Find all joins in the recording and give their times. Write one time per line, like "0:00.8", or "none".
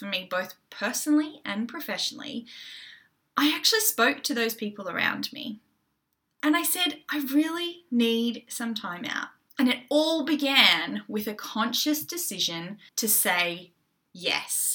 0:09.5
0:12.9

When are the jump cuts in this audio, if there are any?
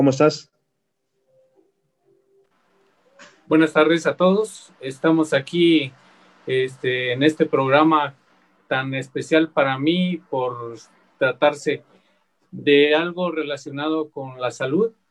none

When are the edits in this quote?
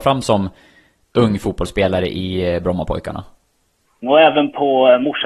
0:04.0

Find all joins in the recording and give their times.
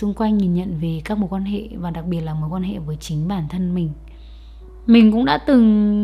none

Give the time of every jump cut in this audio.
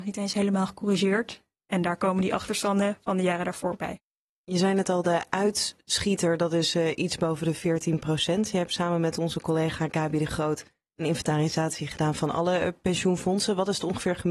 none

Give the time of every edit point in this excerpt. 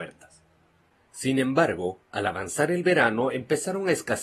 none

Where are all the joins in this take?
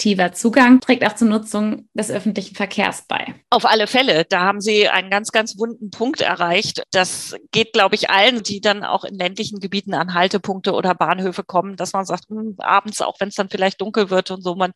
0:08.4

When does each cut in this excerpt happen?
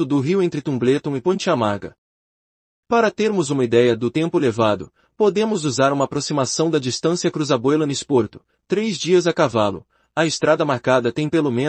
none

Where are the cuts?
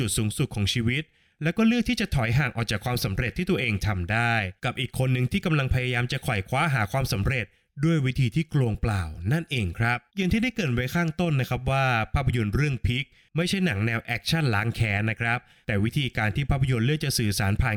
0:04.6
0:10.1

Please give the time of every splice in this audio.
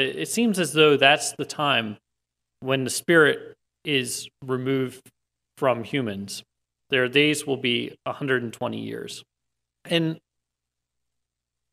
0:06.9
0:09.8

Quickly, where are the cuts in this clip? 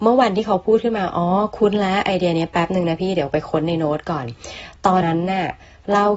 0:05.0

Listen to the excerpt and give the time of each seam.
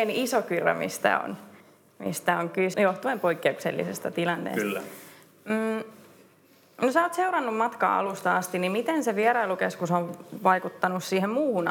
0:02.7

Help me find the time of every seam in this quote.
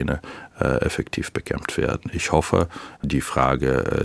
0:03.0

